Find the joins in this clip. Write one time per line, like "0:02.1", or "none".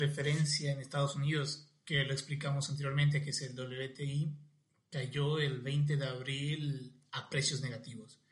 none